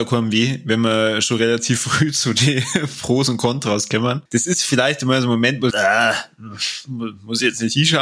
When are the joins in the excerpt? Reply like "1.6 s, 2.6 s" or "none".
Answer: 4.3 s, 5.7 s